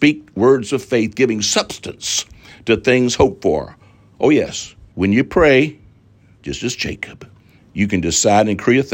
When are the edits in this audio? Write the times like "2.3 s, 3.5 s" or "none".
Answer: 4.9 s, 7.6 s